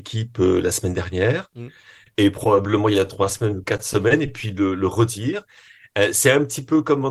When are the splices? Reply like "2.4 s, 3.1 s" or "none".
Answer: none